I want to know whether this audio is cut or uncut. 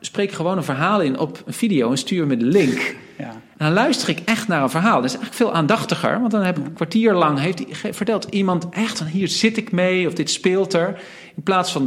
uncut